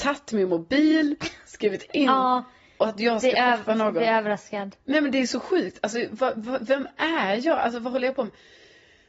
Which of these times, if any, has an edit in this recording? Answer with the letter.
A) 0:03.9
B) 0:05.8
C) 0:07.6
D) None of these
D